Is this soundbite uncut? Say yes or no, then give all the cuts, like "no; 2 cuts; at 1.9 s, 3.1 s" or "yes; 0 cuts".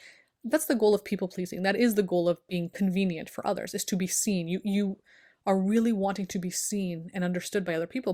yes; 0 cuts